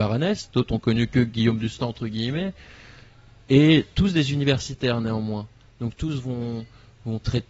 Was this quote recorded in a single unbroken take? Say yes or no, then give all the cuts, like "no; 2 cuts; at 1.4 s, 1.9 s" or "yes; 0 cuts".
yes; 0 cuts